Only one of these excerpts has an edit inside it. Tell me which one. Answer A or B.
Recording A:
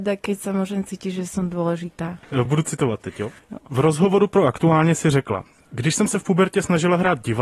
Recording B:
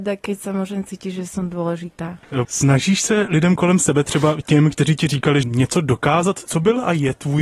B